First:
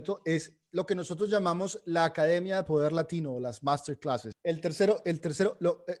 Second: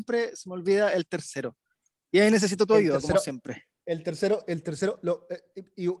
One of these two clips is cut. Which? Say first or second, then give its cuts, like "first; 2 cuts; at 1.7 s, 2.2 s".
first; 1 cut; at 4.3 s